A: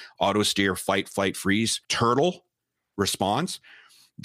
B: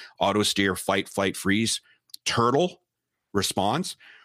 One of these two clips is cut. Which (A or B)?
A